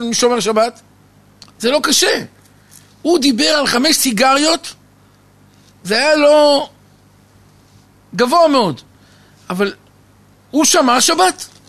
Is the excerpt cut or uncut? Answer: uncut